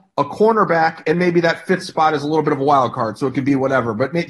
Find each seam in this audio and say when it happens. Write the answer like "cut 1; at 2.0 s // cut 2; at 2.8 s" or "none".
cut 1; at 1.1 s